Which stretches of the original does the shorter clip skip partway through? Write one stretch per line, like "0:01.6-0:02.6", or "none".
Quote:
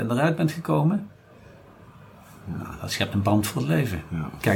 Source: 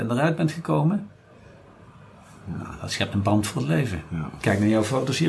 none